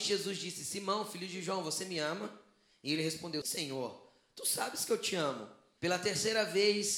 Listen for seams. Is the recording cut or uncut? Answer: cut